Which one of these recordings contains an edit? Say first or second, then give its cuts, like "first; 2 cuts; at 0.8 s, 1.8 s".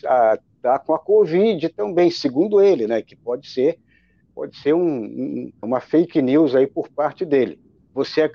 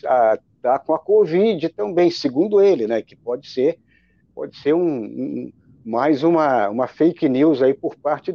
first; 1 cut; at 5.6 s